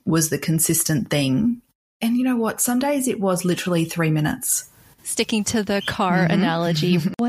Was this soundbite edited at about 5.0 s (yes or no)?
yes